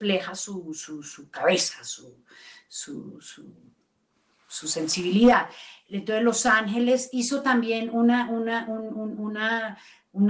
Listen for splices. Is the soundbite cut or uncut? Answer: uncut